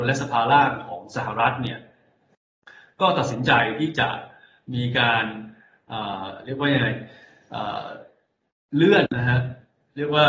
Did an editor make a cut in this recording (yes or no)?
yes